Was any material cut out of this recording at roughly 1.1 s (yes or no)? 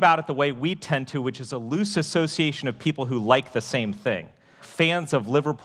no